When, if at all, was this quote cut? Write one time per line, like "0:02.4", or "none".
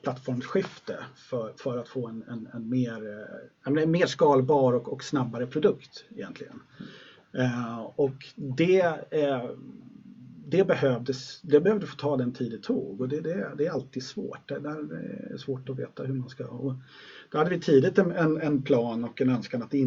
none